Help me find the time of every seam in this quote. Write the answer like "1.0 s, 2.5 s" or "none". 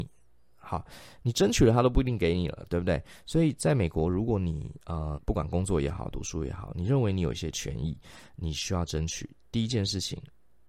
5.1 s